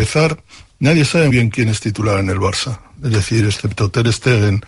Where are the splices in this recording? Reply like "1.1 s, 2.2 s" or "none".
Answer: 1.3 s